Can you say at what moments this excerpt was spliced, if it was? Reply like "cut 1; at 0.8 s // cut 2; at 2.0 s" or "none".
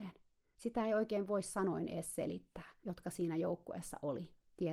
cut 1; at 2.8 s

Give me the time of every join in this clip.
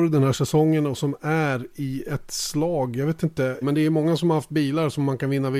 cut 1; at 3.6 s

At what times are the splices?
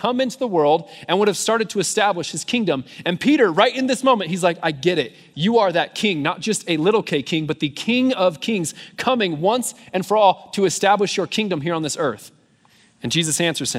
cut 1; at 5.3 s

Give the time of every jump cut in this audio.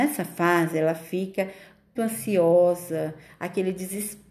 cut 1; at 2.0 s

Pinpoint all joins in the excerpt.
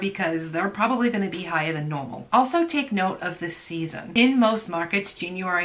none

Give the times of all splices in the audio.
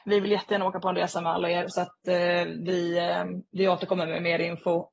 cut 1; at 1.7 s

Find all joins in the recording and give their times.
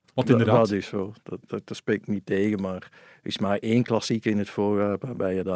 cut 1; at 1.5 s

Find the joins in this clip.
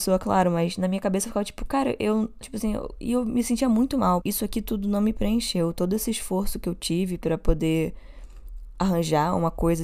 cut 1; at 2.4 s // cut 2; at 4.2 s

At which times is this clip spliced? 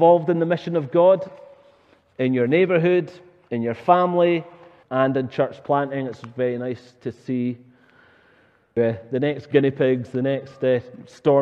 cut 1; at 4.8 s // cut 2; at 8.8 s

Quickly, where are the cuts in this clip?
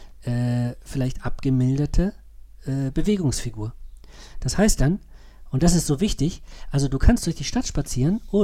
none

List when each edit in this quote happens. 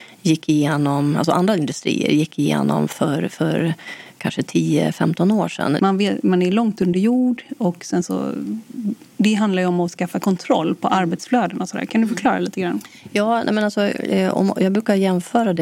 cut 1; at 5.8 s

